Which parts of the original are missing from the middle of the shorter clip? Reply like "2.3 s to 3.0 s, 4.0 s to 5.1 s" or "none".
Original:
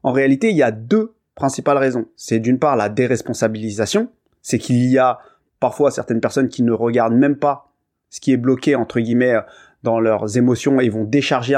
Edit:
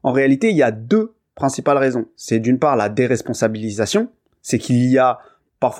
none